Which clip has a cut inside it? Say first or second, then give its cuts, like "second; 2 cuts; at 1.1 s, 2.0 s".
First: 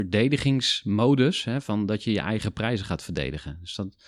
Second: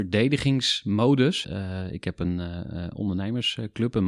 second; 1 cut; at 1.4 s